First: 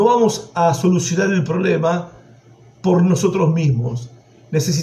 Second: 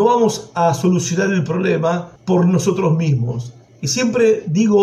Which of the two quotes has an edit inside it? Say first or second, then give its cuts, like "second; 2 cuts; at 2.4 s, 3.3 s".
second; 2 cuts; at 2.2 s, 3.7 s